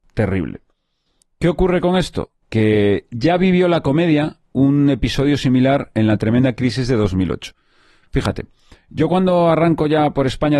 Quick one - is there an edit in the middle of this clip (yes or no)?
no